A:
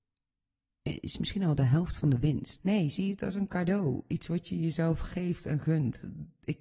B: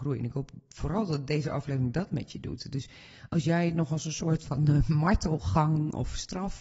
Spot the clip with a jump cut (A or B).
A